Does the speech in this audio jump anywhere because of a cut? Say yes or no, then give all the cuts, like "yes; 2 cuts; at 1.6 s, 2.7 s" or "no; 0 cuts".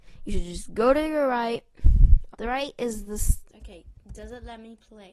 yes; 2 cuts; at 2.3 s, 3.5 s